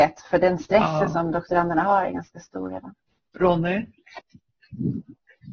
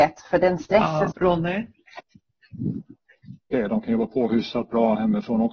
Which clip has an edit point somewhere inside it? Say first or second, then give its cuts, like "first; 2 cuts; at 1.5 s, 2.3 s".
second; 2 cuts; at 1.1 s, 3.5 s